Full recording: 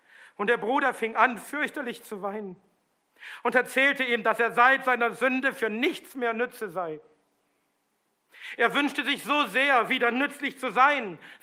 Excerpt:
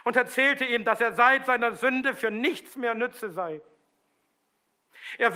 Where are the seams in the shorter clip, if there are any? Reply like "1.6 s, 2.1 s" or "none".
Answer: none